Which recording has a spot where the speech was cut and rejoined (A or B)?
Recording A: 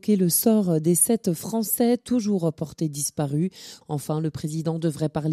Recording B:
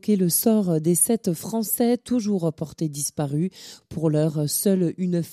A